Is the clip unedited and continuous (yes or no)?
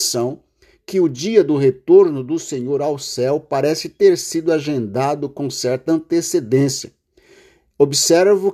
yes